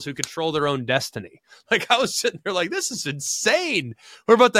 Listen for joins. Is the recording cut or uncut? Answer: uncut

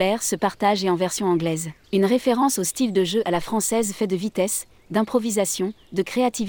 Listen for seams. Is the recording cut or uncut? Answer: cut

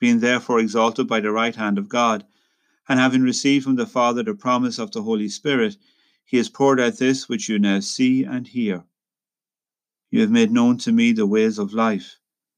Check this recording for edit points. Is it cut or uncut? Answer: cut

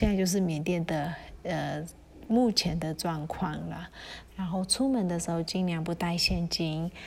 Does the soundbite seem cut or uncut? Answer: cut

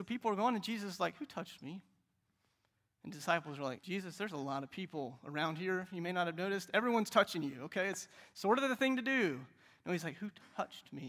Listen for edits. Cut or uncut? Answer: cut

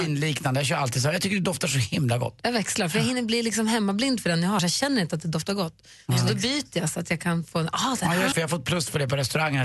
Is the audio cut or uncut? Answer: cut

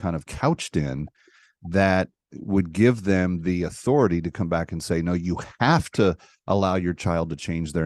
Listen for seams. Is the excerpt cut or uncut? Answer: uncut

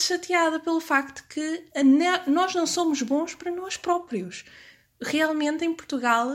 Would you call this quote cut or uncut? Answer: uncut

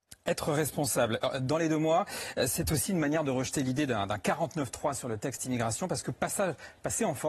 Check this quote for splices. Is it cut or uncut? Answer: uncut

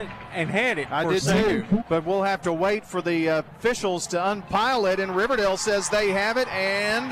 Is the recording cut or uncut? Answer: cut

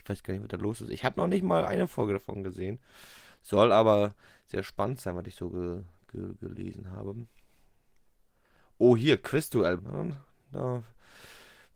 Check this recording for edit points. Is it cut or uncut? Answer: cut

